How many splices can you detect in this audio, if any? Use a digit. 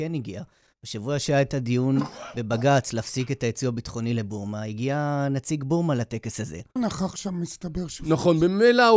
1